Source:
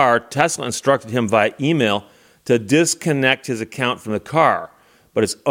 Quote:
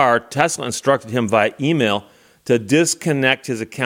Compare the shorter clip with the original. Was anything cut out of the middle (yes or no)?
no